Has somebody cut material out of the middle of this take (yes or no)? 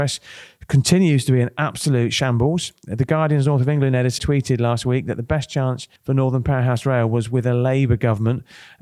yes